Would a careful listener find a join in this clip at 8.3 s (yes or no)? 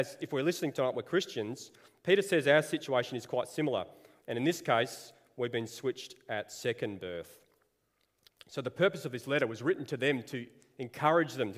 yes